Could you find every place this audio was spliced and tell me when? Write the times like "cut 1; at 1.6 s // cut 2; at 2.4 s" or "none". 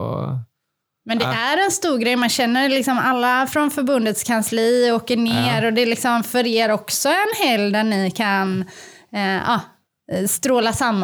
none